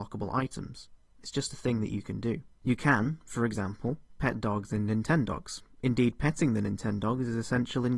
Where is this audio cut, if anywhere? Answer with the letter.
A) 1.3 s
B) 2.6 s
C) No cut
B